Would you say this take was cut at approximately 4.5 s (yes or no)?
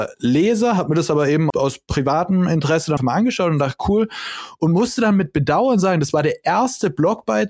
no